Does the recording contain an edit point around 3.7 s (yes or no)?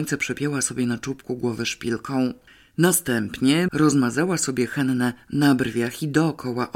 yes